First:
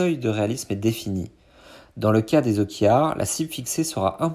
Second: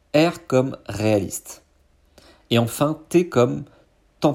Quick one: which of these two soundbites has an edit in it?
second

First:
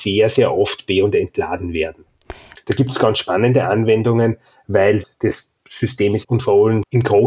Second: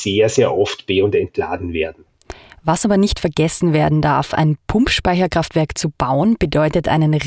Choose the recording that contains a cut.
first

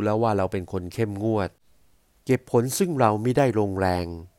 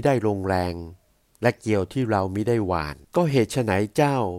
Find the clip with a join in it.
second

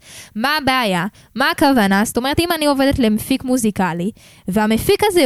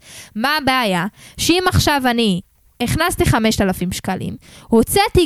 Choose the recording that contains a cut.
first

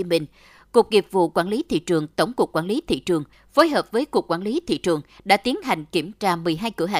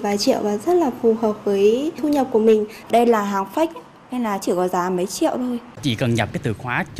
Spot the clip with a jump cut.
second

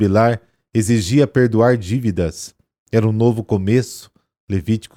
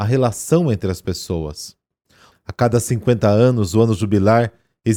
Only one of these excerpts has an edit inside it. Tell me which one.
second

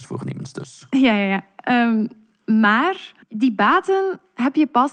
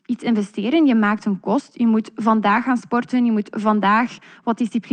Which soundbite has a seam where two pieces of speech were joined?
first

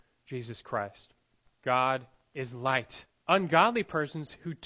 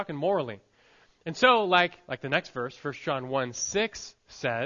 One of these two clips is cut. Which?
first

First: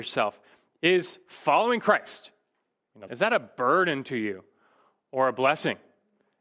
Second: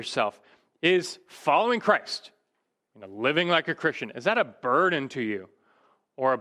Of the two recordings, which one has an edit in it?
first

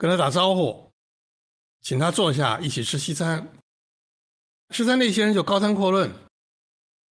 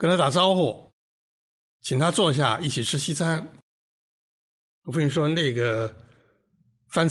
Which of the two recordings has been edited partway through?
first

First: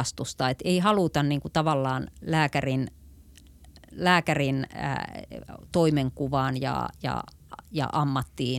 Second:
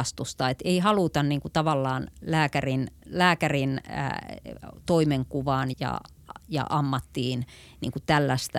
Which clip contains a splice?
second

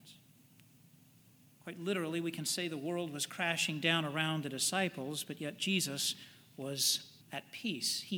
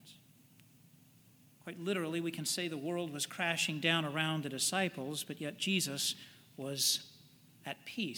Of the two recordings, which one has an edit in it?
first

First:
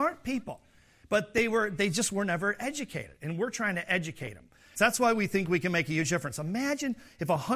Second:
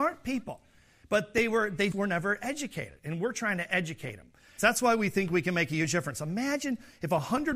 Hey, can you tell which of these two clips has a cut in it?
second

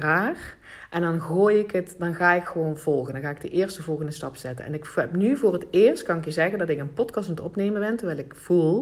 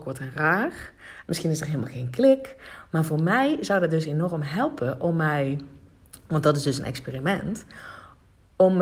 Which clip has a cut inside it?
second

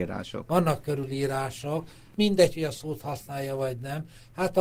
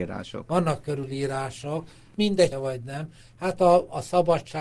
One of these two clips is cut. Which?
second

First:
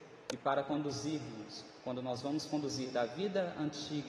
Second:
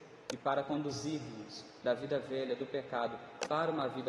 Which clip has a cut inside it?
second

